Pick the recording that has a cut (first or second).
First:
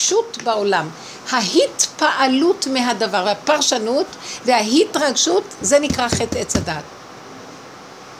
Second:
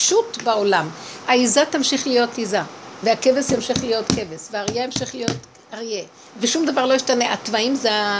second